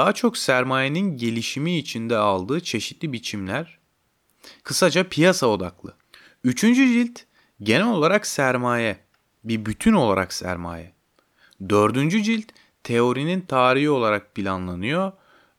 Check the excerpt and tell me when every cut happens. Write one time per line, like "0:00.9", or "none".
0:04.6